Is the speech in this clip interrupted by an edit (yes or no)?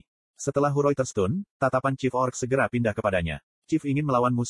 no